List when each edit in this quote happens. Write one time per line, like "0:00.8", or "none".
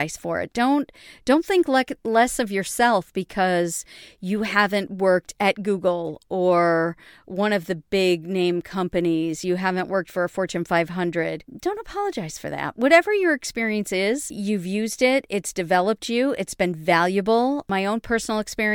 none

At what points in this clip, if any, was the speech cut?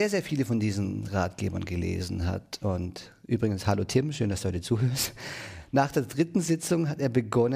none

